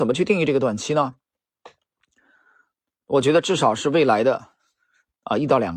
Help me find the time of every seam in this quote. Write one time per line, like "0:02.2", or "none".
none